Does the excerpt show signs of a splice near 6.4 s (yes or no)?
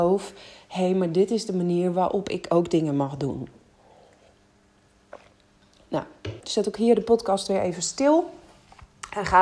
yes